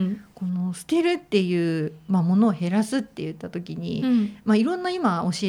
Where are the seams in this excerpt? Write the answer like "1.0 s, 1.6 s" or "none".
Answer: none